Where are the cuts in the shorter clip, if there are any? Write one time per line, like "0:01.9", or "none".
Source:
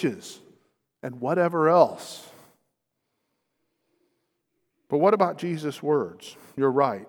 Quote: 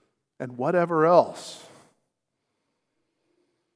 none